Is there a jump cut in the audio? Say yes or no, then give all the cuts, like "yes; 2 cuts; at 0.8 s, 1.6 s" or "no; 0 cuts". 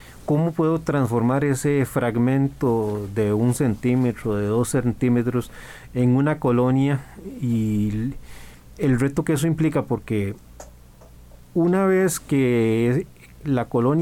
no; 0 cuts